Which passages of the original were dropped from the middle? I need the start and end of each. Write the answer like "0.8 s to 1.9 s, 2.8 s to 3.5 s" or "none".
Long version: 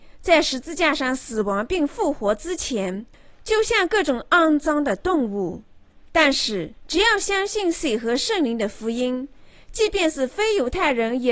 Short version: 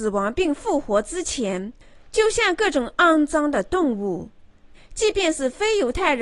6.1 s to 9.5 s

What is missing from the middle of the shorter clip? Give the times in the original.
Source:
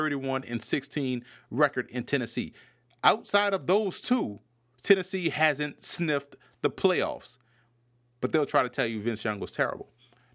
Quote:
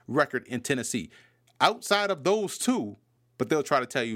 4.6 s to 8.0 s

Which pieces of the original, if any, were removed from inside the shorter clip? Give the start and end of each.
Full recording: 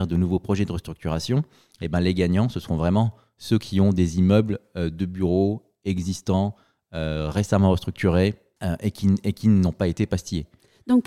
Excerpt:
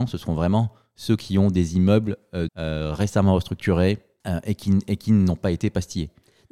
4.9 s to 6.8 s

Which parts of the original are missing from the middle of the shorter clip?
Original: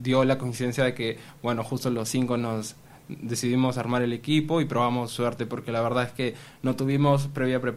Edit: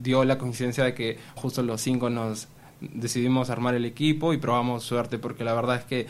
1.4 s to 1.6 s

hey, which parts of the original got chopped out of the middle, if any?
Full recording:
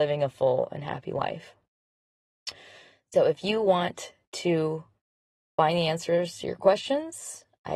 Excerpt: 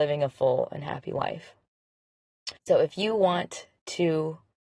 2.6 s to 3.0 s

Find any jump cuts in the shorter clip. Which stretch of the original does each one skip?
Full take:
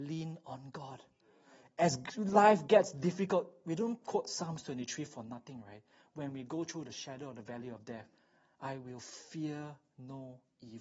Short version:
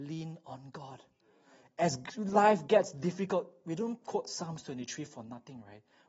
none

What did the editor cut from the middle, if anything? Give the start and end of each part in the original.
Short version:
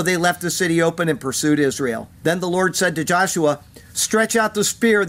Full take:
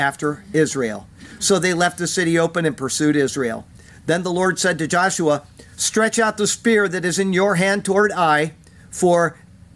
3.7 s to 4.0 s

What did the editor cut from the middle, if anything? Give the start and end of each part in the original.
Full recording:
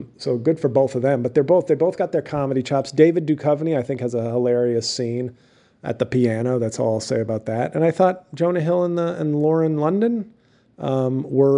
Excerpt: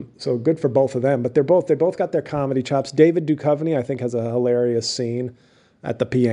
none

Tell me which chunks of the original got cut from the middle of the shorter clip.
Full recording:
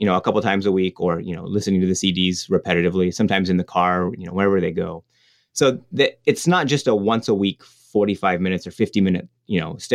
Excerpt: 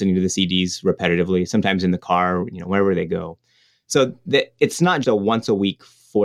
6.7 s to 6.8 s

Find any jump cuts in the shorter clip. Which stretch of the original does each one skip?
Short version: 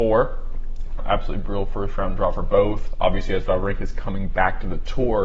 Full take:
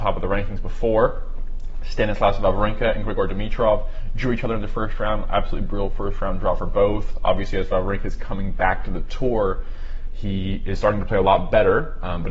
1.8 s to 5.2 s

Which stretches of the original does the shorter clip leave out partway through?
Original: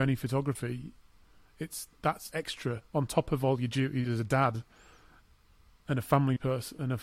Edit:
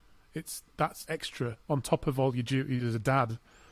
none

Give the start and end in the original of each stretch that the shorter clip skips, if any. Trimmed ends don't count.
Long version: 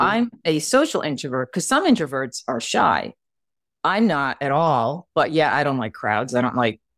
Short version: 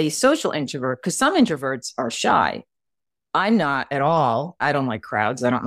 5.1 s to 5.5 s

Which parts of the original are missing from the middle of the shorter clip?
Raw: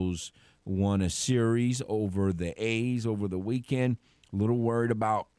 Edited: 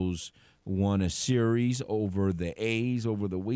none

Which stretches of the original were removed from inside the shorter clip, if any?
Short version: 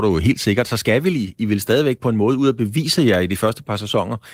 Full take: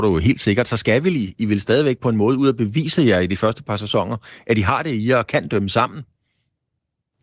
none

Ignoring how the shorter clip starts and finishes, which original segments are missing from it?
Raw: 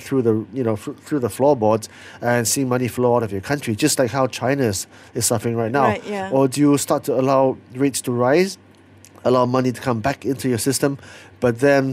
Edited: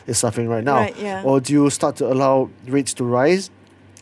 none

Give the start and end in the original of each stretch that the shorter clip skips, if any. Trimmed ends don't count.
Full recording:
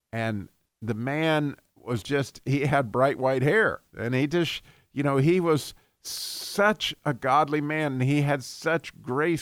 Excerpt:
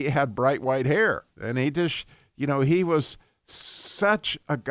none

